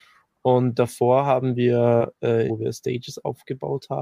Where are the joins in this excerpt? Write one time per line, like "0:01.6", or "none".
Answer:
0:02.5